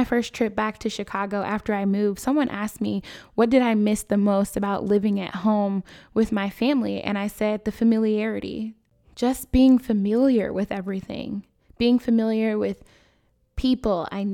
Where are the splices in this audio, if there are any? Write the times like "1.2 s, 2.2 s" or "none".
none